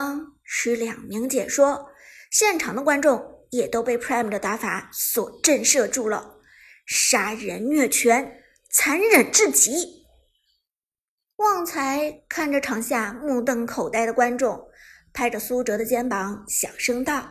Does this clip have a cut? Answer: no; 0 cuts

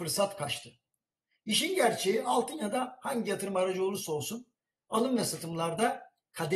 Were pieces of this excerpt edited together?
no; 0 cuts

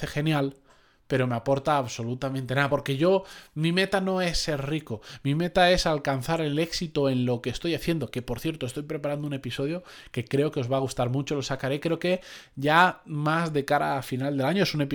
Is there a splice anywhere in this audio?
no; 0 cuts

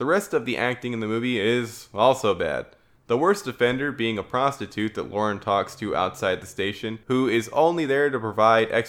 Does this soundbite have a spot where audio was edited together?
yes; 1 cut; at 7.0 s

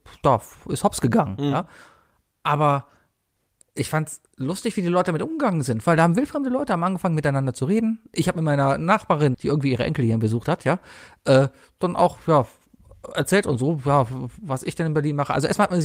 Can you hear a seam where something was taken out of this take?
yes; 1 cut; at 9.3 s

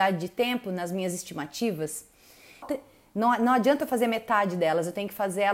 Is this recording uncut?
no; 1 cut; at 2.6 s

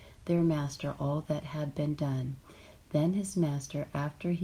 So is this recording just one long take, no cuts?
yes; 0 cuts

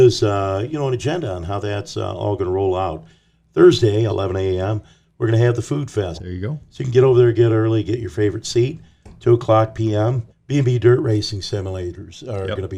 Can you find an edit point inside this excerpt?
yes; 3 cuts; at 4.1 s, 6.1 s, 10.3 s

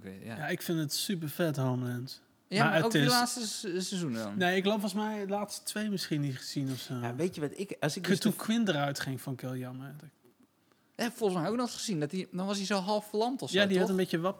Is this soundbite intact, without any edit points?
yes; 0 cuts

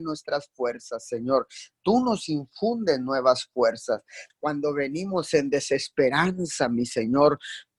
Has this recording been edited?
yes; 1 cut; at 4.3 s

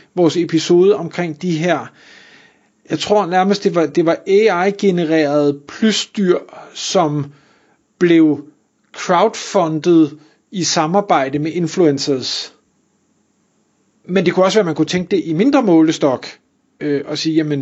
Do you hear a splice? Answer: yes; 1 cut; at 13.9 s

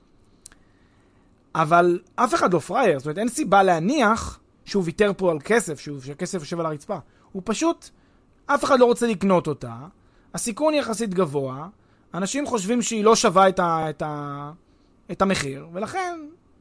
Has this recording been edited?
no; 0 cuts

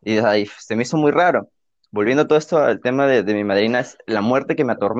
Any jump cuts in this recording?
no; 0 cuts

